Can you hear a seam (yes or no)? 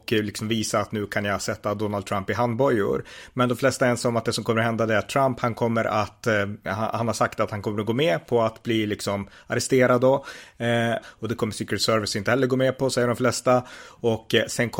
yes